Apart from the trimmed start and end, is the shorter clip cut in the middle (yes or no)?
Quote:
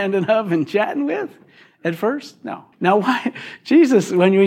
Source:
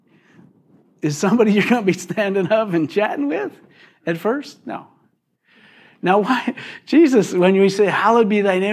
yes